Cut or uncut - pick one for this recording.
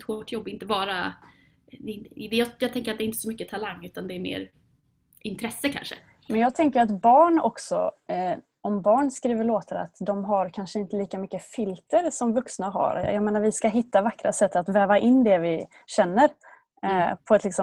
uncut